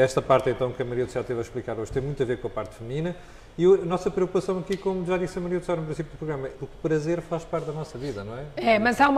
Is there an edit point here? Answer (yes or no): yes